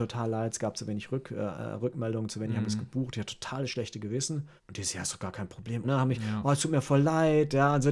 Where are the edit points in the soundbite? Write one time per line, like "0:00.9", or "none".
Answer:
0:04.6
0:05.8